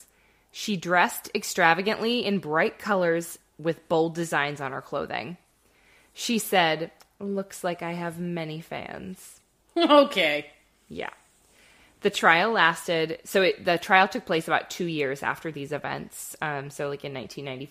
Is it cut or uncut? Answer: uncut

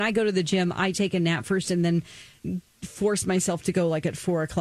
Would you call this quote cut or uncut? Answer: uncut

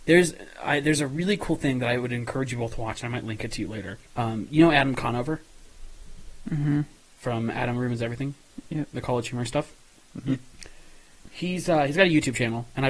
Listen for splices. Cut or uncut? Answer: cut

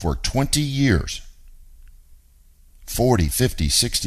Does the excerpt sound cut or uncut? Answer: uncut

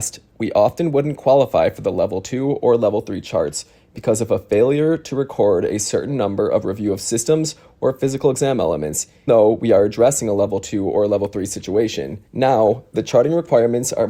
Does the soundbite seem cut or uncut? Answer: cut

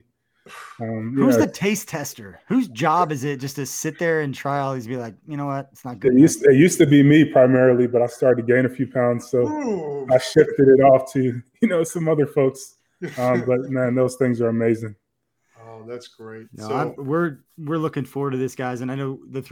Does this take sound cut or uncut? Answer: uncut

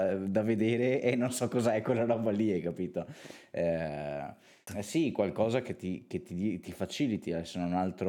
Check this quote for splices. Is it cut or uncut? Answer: cut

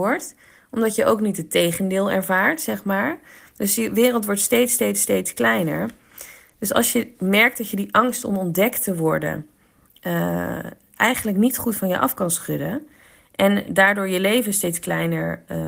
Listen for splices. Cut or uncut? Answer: uncut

